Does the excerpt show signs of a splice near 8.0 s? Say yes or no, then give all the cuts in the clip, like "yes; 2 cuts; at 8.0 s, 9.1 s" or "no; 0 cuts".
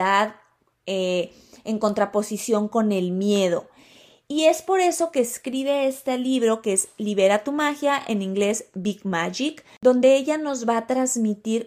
no; 0 cuts